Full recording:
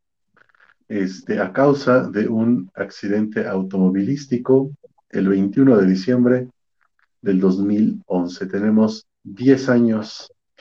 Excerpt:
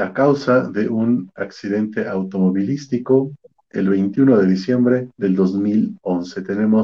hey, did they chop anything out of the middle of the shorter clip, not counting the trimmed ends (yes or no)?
yes